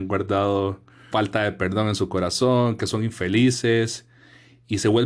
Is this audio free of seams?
no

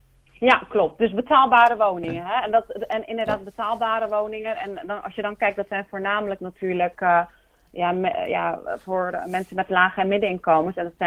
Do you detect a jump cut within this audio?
no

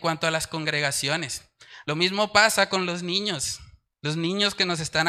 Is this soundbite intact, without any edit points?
no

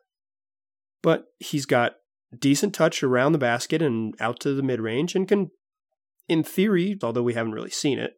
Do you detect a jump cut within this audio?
yes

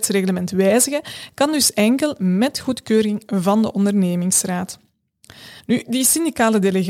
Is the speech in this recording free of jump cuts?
no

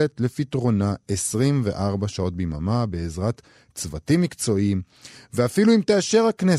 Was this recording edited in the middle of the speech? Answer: no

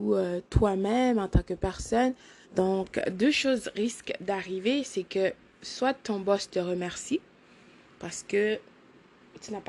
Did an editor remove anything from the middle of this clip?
yes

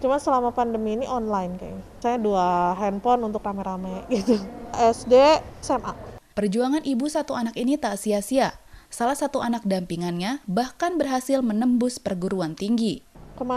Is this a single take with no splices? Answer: no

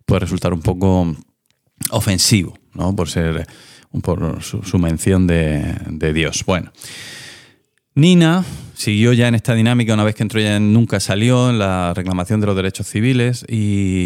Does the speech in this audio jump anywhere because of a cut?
no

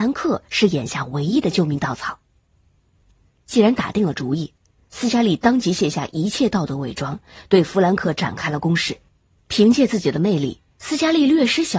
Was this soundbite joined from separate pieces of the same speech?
no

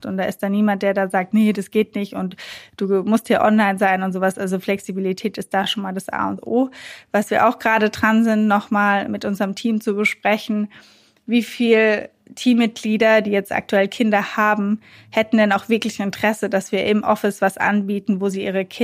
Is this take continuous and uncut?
yes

